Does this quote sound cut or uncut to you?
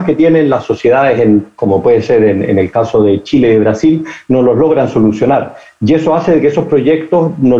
uncut